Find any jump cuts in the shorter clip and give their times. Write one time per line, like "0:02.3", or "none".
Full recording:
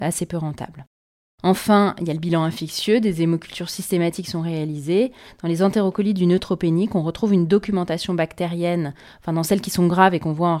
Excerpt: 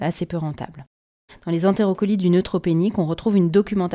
0:01.3